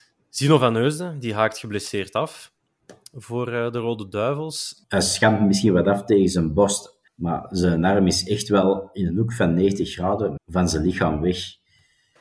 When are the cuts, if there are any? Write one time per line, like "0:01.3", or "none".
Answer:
0:04.8
0:07.1
0:10.4